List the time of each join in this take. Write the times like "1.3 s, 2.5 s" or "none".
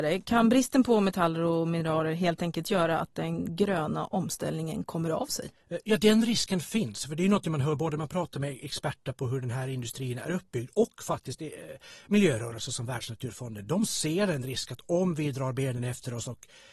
none